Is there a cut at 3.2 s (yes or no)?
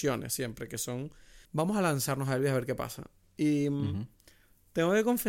no